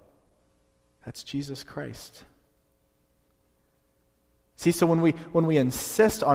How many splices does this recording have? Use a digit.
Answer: 0